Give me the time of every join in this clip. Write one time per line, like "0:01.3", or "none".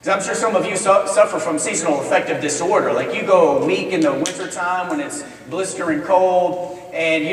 none